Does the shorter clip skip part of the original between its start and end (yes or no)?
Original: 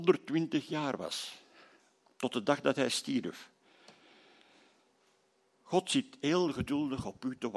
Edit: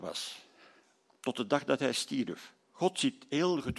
yes